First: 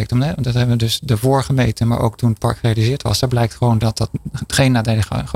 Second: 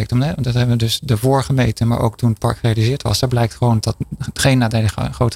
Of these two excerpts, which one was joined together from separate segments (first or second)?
second